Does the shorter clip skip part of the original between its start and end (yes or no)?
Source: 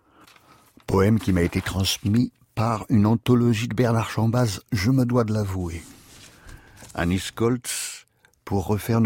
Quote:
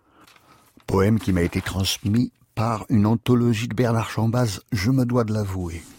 no